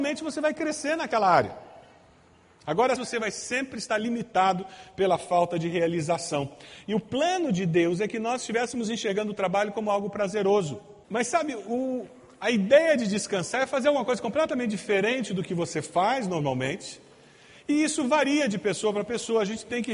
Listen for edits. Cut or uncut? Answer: cut